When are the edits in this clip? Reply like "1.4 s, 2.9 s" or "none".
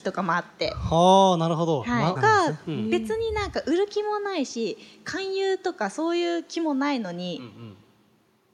2.2 s